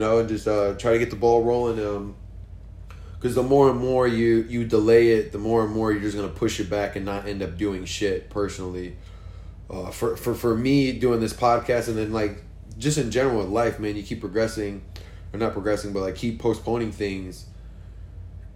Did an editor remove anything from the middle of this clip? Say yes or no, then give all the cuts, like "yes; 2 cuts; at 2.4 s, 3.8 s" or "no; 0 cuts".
no; 0 cuts